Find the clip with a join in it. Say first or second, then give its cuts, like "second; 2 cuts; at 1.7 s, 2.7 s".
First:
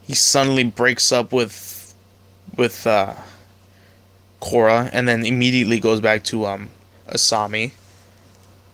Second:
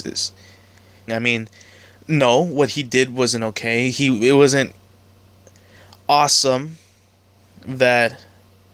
second; 1 cut; at 1.1 s